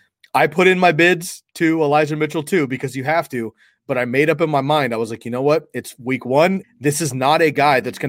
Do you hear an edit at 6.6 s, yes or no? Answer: yes